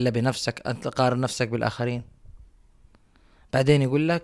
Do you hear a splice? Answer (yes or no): no